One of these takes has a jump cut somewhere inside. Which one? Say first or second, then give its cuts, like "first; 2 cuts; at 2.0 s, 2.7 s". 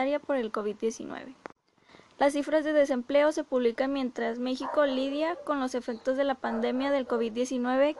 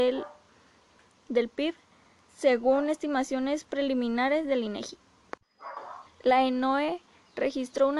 second; 1 cut; at 6.1 s